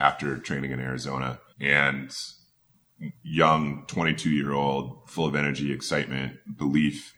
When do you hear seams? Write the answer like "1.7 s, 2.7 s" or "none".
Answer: 1.5 s, 3.2 s